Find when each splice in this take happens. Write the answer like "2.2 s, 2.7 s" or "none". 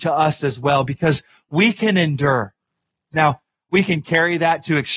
3.1 s

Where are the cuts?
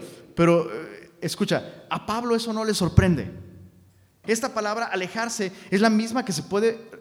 4.2 s

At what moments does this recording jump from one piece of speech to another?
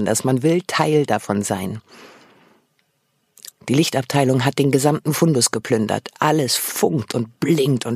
3.5 s

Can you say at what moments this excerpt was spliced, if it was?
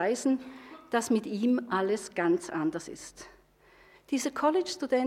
3.9 s

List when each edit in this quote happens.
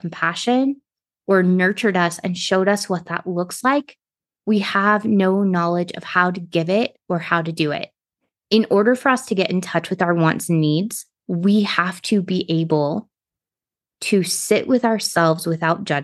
none

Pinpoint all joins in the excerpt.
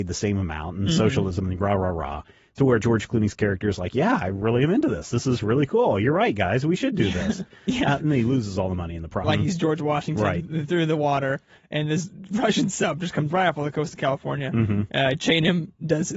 7.5 s, 9.2 s

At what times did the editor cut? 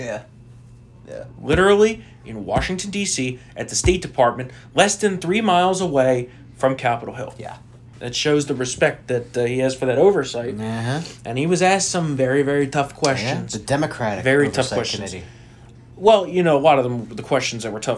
none

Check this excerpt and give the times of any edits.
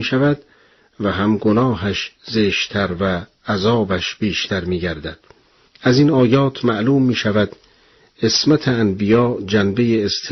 5.7 s

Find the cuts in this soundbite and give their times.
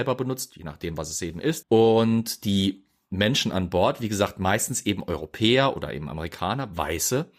1.6 s

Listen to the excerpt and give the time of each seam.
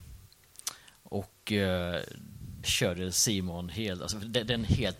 2.6 s

